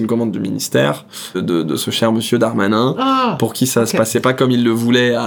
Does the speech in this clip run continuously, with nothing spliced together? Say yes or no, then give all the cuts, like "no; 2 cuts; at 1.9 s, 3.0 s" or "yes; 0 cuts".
no; 1 cut; at 1.3 s